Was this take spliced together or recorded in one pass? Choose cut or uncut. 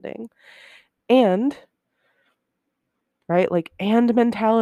uncut